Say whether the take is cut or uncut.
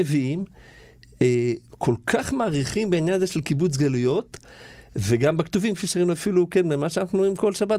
uncut